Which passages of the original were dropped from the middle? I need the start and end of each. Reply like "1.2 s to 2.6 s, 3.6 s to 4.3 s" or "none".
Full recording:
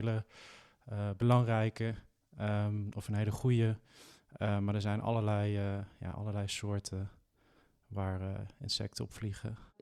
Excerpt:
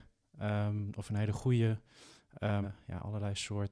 4.6 s to 5.7 s